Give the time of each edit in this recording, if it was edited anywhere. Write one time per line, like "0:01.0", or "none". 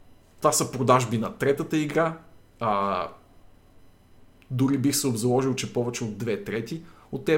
none

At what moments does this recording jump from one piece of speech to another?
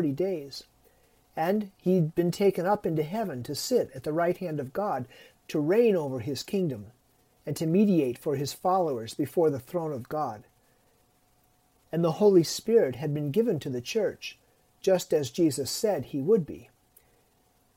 0:05.4

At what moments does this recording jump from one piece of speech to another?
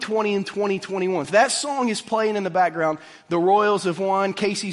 0:01.2

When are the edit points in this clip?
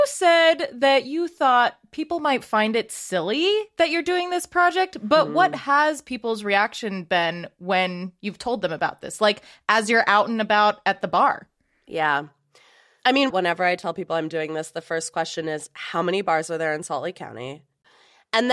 0:13.3

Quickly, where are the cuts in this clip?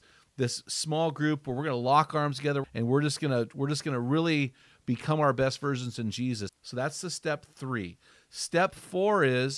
0:02.6
0:06.5

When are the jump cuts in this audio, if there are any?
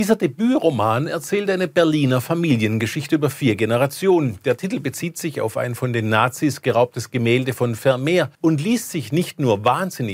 0:08.4

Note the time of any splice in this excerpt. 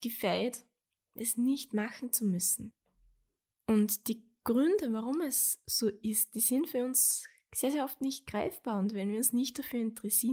0:01.2

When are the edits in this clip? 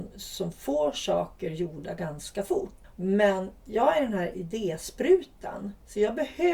0:02.9

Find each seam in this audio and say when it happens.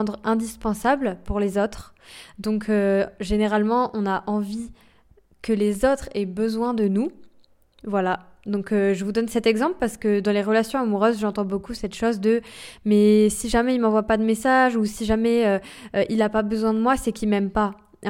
none

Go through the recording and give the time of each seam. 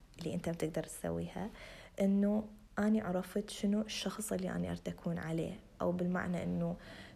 none

